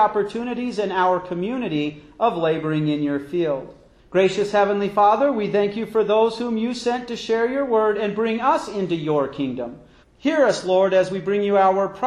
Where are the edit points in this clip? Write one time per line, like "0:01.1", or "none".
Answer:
0:04.0
0:10.0